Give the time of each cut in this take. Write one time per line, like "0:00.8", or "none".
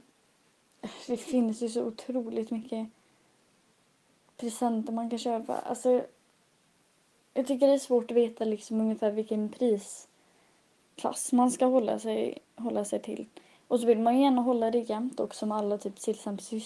none